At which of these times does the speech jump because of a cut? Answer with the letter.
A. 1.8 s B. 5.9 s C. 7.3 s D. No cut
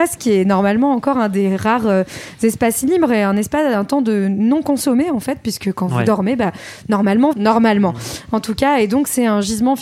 C